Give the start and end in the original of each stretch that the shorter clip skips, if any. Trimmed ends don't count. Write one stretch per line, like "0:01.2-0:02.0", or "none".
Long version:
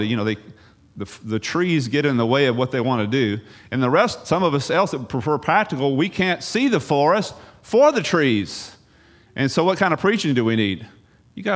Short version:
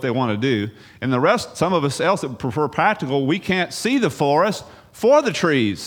none